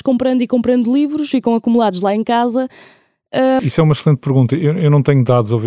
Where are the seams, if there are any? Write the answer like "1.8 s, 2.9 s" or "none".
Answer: 1.3 s, 3.6 s